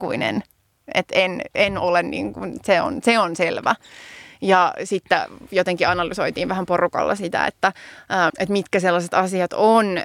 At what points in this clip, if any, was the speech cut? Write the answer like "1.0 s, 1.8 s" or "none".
8.3 s